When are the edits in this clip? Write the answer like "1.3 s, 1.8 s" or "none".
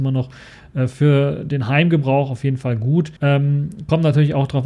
3.2 s